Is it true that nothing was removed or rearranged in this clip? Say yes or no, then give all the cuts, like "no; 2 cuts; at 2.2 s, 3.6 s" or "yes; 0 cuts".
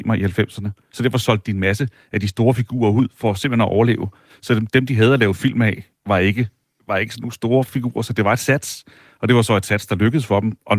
yes; 0 cuts